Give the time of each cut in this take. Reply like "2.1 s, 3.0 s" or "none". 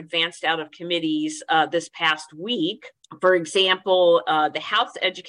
none